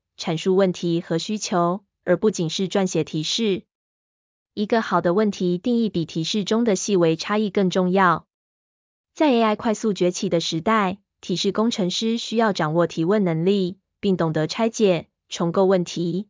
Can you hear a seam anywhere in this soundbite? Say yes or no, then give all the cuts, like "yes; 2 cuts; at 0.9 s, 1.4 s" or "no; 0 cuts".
yes; 1 cut; at 2.3 s